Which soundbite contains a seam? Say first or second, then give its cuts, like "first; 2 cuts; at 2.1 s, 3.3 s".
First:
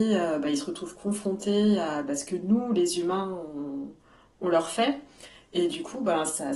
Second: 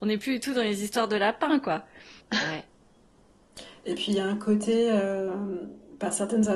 second; 1 cut; at 2.2 s